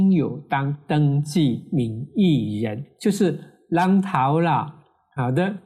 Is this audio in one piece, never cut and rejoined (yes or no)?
yes